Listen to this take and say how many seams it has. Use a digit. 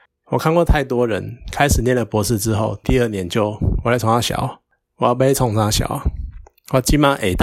1